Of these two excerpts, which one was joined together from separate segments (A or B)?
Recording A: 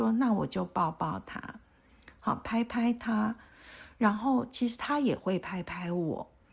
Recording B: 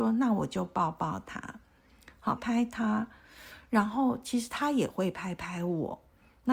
B